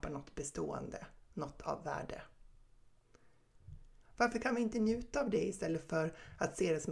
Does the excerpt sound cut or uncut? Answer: cut